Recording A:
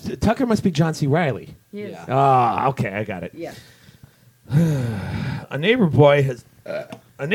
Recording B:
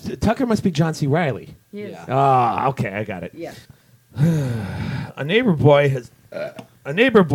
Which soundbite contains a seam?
B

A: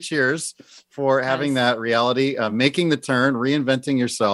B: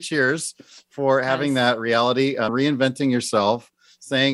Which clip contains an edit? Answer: B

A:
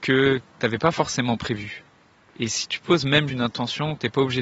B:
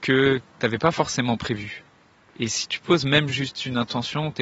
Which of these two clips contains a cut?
A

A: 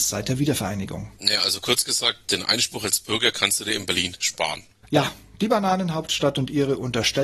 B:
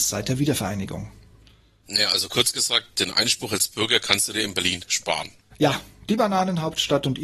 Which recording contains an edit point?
A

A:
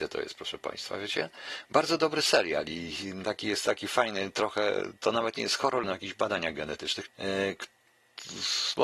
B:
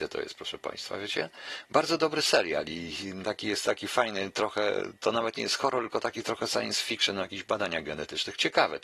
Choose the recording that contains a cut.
A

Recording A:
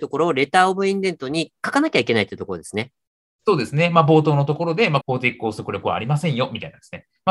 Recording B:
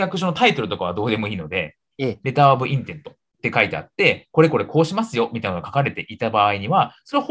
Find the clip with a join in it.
A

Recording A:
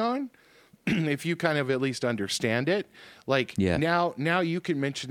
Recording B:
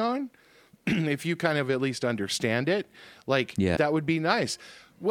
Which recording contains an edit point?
B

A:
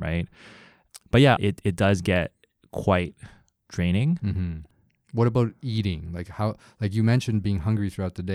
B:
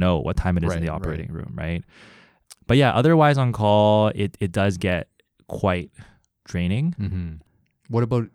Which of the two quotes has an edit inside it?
A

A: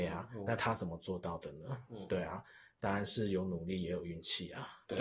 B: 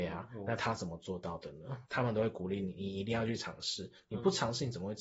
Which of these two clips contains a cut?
B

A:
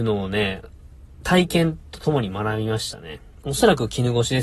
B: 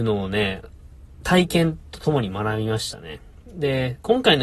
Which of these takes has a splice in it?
A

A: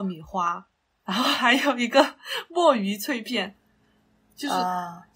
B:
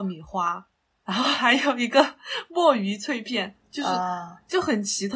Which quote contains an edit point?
B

